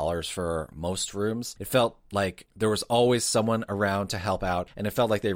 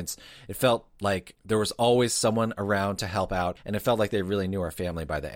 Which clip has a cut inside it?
first; 1 cut; at 1.6 s

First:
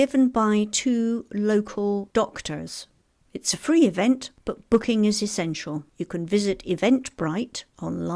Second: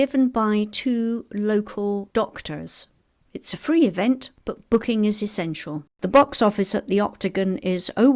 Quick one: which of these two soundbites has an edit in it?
second; 1 cut; at 5.9 s

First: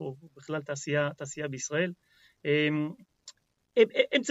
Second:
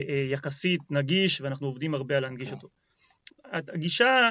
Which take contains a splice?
second; 1 cut; at 3.3 s

